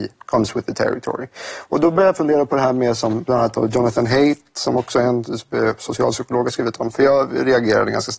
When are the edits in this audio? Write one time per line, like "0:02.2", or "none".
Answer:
0:06.9